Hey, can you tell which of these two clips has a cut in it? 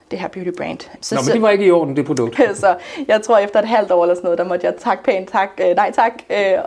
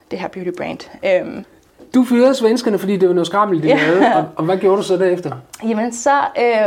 first; 2 cuts; at 1.0 s, 2.4 s

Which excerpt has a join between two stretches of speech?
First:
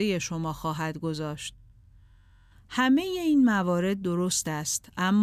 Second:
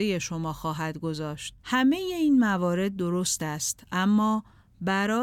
second; 1 cut; at 1.6 s

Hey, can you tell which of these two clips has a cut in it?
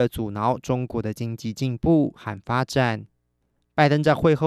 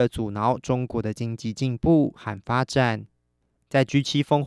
second; 1 cut; at 3.5 s

